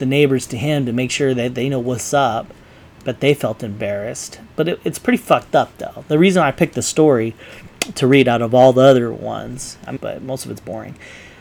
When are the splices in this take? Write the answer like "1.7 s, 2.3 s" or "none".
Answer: 10.0 s